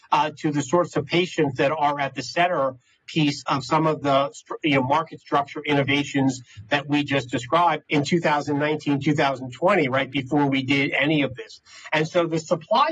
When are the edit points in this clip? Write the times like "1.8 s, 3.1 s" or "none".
7.8 s